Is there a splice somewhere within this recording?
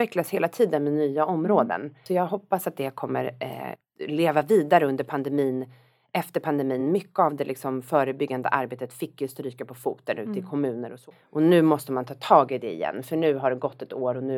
no; 0 cuts

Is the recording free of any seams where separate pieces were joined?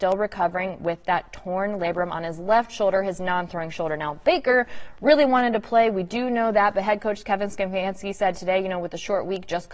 yes; 0 cuts

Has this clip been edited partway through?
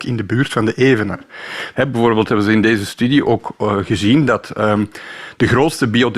yes; 1 cut; at 1.7 s

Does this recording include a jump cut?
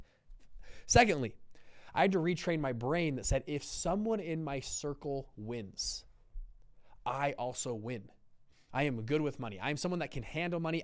yes; 1 cut; at 8.7 s

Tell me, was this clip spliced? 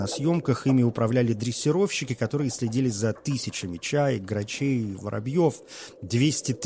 yes; 1 cut; at 5.0 s

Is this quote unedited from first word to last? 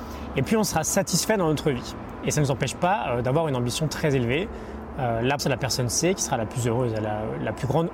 no; 1 cut; at 5.4 s

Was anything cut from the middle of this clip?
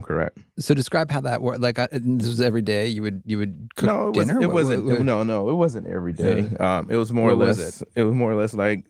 no; 0 cuts

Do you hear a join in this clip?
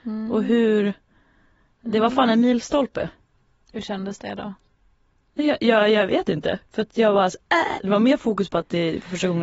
yes; 1 cut; at 7.8 s

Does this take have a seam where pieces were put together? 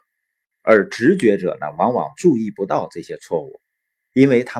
no; 0 cuts

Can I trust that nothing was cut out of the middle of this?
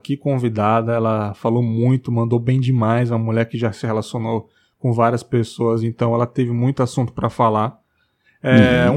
yes; 0 cuts

